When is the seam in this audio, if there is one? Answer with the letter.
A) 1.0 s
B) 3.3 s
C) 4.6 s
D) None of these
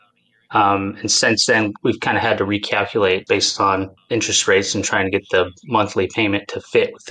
B